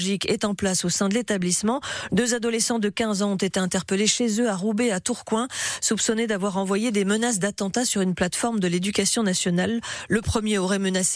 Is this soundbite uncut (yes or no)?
no